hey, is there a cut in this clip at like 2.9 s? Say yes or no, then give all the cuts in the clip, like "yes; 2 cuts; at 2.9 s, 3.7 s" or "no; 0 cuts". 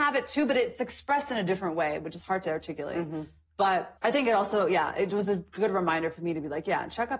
no; 0 cuts